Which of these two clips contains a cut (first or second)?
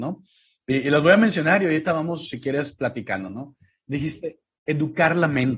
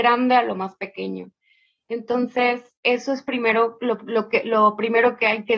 second